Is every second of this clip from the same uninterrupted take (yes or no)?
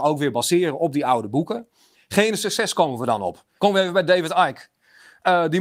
no